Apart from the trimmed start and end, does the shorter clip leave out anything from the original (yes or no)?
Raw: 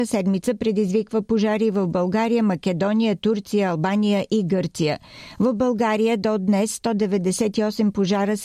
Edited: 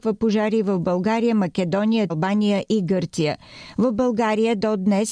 yes